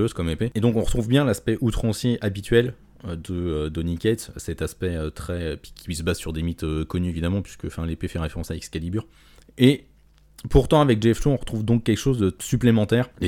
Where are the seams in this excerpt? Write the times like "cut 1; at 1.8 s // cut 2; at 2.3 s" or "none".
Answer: none